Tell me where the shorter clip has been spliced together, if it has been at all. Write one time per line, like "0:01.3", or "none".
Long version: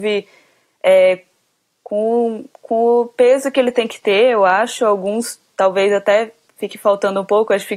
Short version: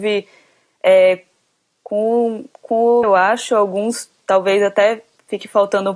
0:03.0